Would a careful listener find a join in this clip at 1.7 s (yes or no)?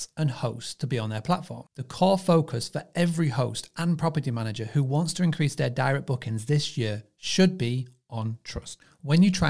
yes